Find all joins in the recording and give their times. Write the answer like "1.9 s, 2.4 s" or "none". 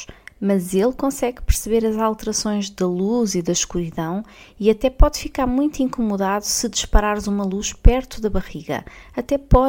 none